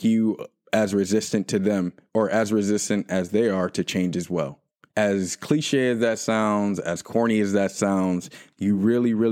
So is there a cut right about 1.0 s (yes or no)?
no